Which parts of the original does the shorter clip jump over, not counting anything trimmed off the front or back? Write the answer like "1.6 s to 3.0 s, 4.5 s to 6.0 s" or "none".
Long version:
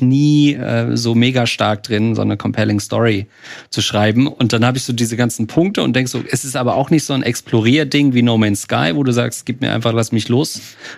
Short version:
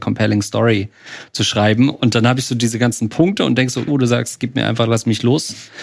6.3 s to 8.9 s